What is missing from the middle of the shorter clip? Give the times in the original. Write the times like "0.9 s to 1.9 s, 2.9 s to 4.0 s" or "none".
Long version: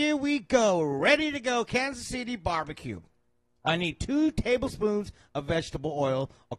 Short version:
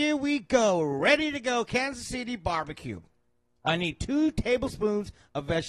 none

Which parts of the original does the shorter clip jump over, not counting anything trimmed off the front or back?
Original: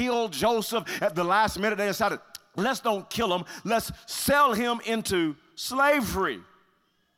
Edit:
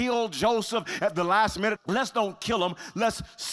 1.8 s to 2.4 s

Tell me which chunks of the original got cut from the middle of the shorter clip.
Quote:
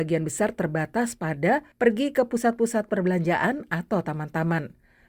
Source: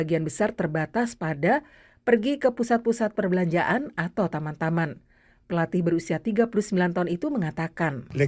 1.7 s to 2.0 s

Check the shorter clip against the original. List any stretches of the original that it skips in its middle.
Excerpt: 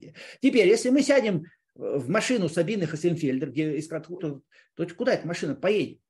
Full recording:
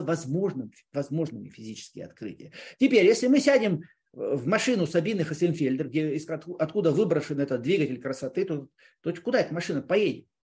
6.6 s to 8.5 s

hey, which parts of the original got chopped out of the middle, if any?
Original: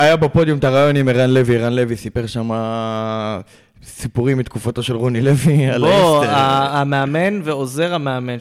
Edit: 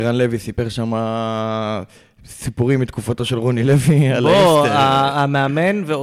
none

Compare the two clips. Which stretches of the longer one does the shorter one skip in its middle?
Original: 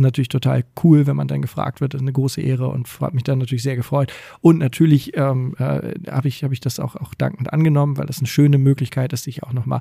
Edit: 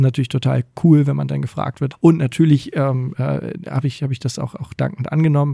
1.9 s to 4.3 s

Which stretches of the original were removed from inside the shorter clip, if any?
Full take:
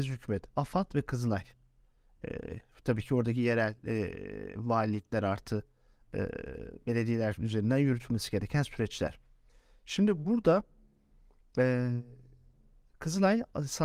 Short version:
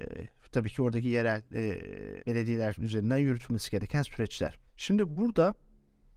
4.5 s to 6.8 s, 9.3 s to 9.8 s

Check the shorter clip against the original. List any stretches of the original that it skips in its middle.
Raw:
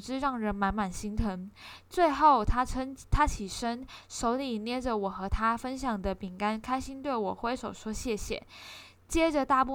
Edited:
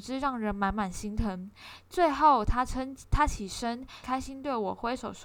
4.0 s to 6.6 s

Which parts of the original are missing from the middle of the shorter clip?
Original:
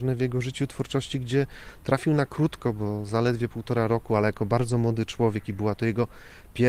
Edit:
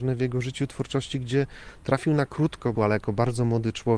2.7 s to 4.1 s

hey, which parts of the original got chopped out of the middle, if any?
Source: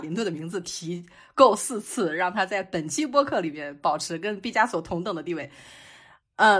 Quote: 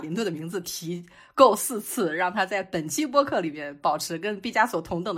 none

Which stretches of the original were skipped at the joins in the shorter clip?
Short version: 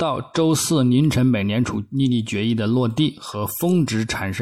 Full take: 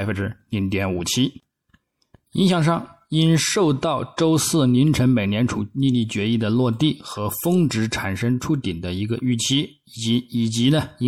none

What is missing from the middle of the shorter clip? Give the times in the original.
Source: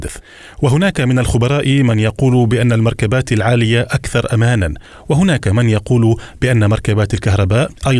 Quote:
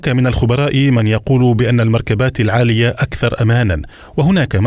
none

